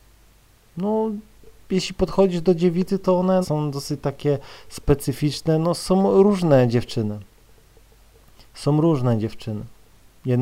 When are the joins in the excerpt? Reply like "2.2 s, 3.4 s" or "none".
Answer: 3.4 s